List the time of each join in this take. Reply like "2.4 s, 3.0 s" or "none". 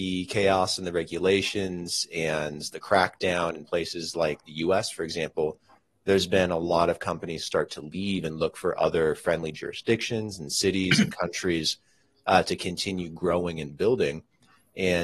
none